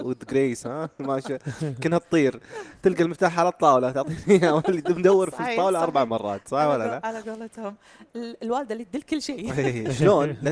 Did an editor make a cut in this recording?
no; 0 cuts

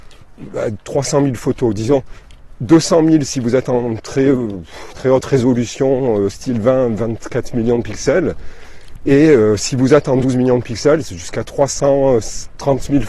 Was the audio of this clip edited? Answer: no; 0 cuts

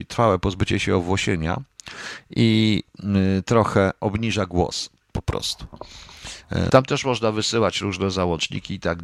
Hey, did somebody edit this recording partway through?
yes; 1 cut; at 6.7 s

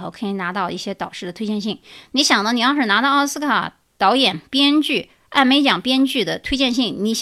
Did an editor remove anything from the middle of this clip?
no; 0 cuts

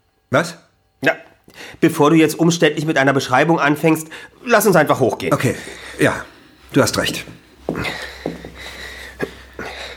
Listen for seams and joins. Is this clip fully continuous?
yes; 0 cuts

